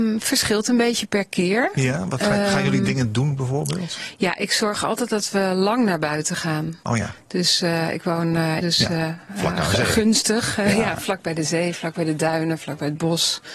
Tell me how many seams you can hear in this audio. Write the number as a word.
one